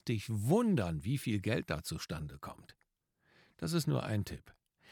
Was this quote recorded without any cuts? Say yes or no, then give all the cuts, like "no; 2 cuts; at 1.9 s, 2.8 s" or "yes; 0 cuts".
yes; 0 cuts